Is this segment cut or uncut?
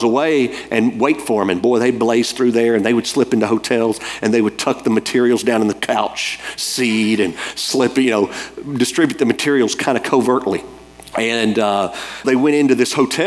cut